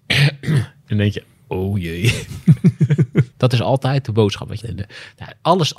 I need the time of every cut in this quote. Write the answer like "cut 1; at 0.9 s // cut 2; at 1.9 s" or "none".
cut 1; at 3.3 s // cut 2; at 4.6 s